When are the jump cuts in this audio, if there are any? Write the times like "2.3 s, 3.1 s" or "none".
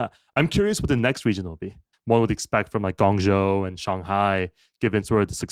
1.9 s